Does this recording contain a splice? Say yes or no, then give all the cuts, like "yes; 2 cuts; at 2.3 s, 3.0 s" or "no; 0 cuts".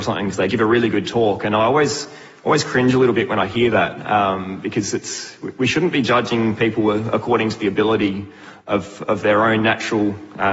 no; 0 cuts